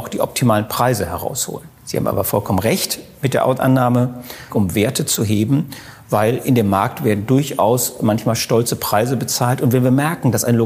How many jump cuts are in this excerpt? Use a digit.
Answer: 3